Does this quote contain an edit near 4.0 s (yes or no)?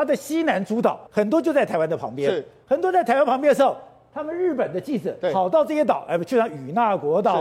no